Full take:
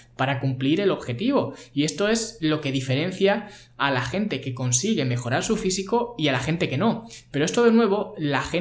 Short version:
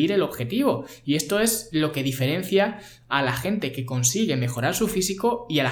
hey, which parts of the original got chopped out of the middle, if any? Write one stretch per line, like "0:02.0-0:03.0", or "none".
none